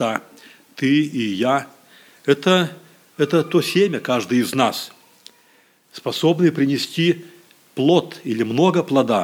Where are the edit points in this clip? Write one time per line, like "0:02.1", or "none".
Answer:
none